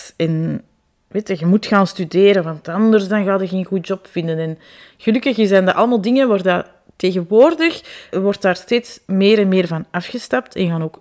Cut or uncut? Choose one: cut